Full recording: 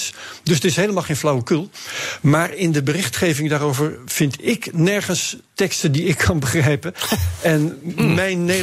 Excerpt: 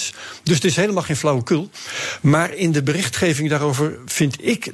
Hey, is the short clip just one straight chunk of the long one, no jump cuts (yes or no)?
yes